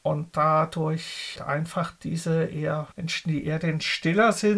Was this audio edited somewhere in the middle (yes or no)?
yes